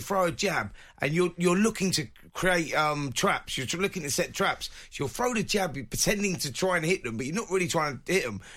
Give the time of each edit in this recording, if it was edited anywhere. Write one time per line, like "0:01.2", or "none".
none

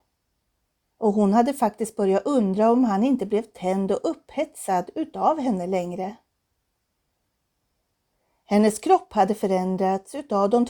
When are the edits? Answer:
0:00.9

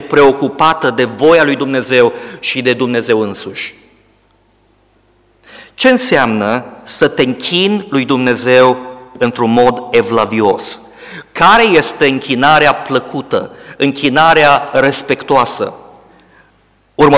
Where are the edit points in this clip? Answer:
none

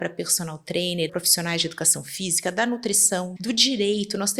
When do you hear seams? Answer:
0:01.1
0:03.4

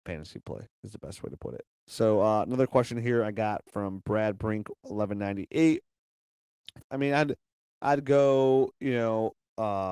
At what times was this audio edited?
0:01.7
0:06.8

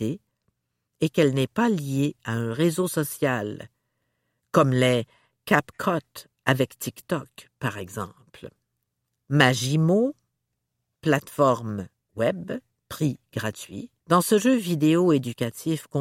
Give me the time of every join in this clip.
0:09.3
0:14.0

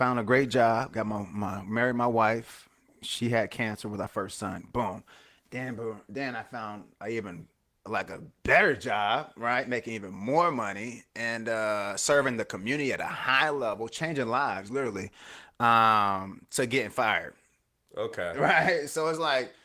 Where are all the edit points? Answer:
none

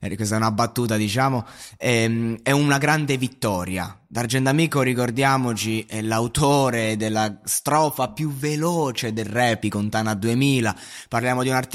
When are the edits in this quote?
0:09.6

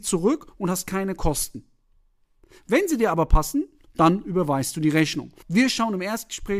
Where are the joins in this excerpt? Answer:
0:05.4

